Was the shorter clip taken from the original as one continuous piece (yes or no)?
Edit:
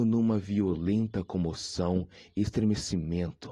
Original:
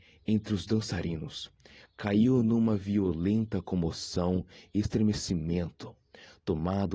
yes